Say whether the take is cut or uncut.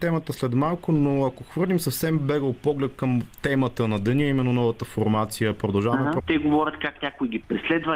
cut